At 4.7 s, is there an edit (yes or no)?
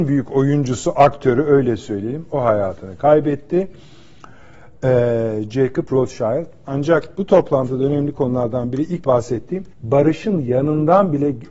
no